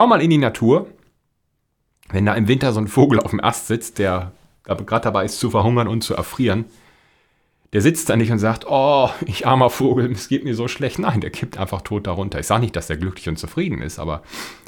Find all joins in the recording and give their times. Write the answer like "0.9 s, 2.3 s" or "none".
none

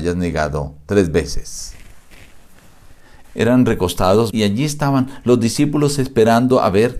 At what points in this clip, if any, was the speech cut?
3.2 s, 4.3 s

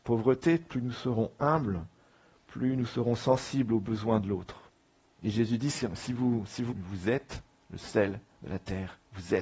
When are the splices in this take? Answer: 5.1 s, 6.7 s

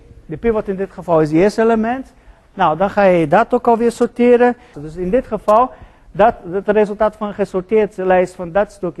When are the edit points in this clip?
4.7 s

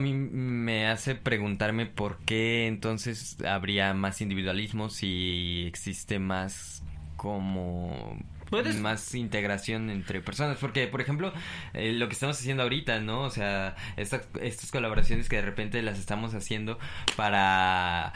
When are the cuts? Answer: none

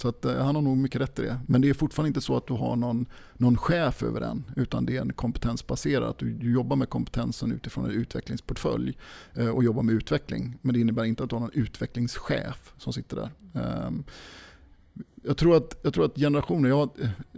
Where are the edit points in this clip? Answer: none

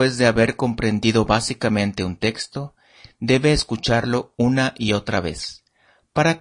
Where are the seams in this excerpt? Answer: none

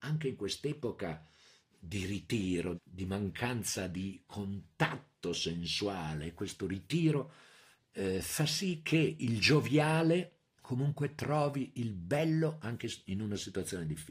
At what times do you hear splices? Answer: 2.7 s, 10.5 s

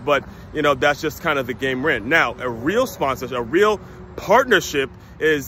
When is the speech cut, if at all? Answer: none

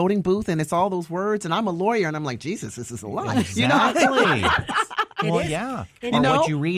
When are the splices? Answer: none

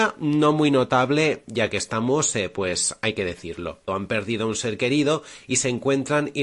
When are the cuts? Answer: 3.9 s

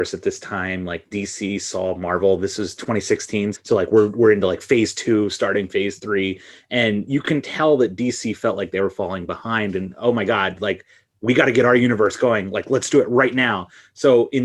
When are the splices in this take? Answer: 3.5 s

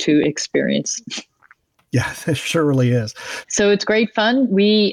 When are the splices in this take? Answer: 3.4 s

